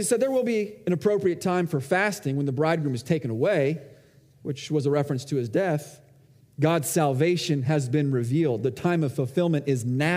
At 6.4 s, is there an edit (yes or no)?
yes